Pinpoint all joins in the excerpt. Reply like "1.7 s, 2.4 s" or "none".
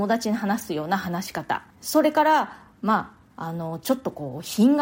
1.7 s